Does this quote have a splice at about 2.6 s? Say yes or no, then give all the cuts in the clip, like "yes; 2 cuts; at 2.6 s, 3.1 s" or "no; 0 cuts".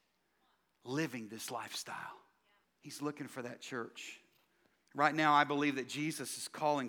yes; 1 cut; at 2.6 s